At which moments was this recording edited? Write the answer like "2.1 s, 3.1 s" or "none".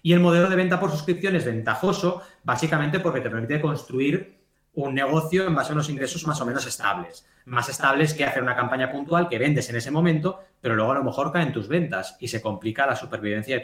none